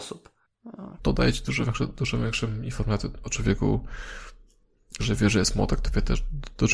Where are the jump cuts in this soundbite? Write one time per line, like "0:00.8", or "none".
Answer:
0:01.0
0:05.0